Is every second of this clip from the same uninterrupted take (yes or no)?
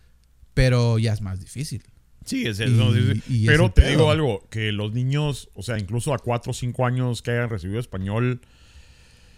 yes